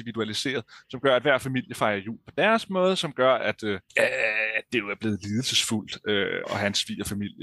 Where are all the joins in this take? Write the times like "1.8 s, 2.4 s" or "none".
3.9 s, 6.4 s